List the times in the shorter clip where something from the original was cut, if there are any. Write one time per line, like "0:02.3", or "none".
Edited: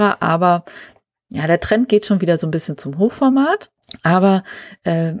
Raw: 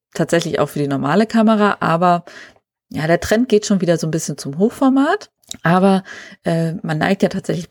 none